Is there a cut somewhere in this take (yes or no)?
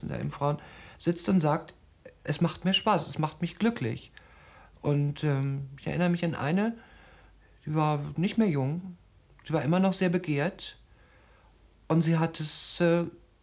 no